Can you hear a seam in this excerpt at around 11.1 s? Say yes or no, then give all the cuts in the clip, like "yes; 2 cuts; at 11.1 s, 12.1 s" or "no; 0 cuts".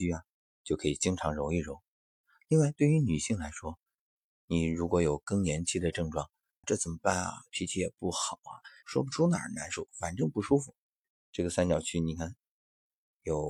yes; 3 cuts; at 6.6 s, 8.8 s, 11.1 s